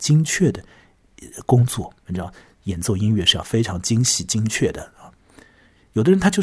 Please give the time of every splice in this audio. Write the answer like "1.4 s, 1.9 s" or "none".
none

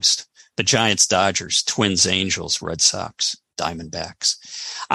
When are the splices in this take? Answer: none

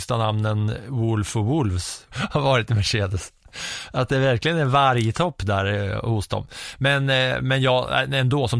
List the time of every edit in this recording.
2.1 s

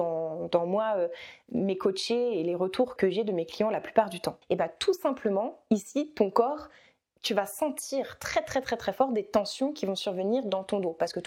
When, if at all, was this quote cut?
3.0 s, 4.4 s

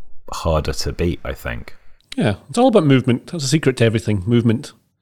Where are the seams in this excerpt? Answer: none

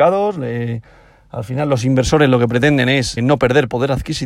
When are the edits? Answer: 3.2 s

